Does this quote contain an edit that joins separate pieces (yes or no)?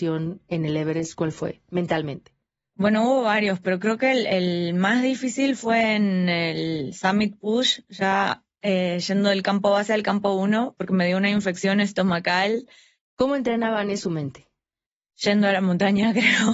yes